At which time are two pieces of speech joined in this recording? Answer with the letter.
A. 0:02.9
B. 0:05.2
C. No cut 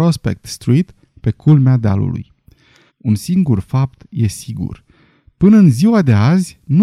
A